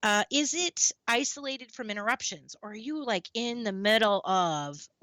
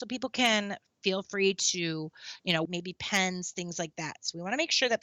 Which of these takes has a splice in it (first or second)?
second